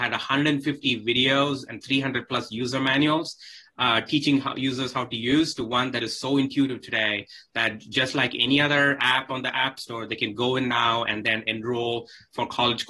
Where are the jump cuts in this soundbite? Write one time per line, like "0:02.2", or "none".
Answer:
0:01.8